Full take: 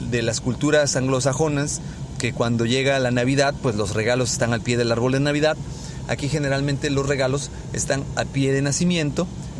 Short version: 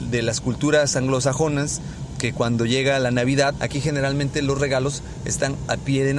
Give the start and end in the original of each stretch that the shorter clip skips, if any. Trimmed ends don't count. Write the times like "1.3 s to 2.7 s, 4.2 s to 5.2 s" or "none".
3.6 s to 6.1 s